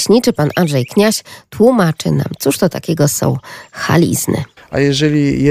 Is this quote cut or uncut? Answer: cut